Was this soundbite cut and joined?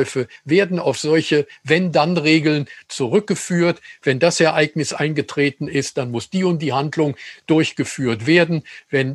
no; 0 cuts

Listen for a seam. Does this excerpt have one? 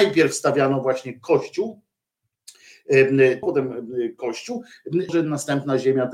yes; 2 cuts; at 3.4 s, 5.1 s

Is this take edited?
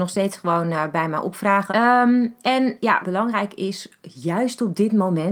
yes; 2 cuts; at 1.7 s, 3.0 s

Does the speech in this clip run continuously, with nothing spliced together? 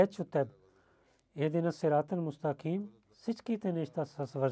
no; 1 cut; at 3.1 s

